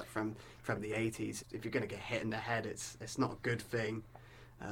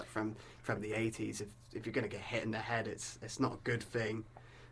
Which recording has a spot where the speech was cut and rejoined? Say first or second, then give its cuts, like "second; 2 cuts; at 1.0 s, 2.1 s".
first; 1 cut; at 1.4 s